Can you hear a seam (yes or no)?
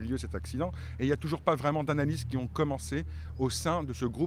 no